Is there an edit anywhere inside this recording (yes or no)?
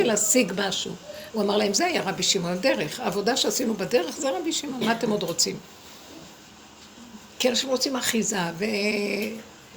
yes